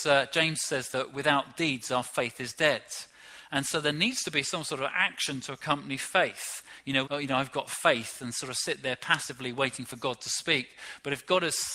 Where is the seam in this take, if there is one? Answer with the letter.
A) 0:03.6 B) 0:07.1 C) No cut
B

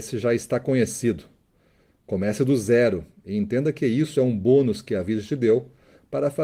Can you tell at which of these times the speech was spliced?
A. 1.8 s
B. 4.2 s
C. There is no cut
C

